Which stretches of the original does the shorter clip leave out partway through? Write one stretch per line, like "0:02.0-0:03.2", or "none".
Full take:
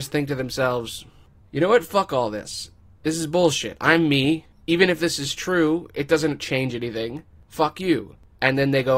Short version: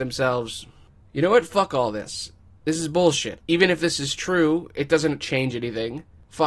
0:03.8-0:04.6